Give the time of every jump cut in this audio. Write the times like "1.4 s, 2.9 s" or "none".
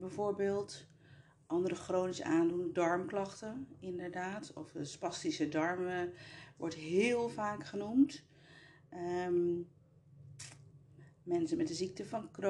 none